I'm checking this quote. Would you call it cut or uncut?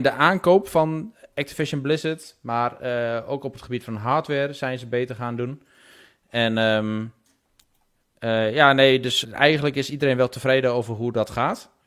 cut